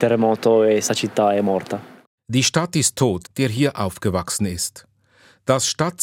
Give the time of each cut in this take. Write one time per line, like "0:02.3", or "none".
0:03.2